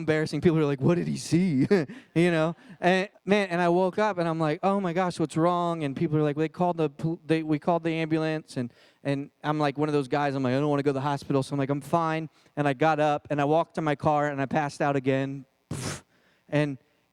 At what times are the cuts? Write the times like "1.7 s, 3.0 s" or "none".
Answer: 3.1 s